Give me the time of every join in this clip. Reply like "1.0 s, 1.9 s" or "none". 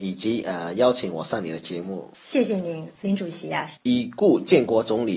3.8 s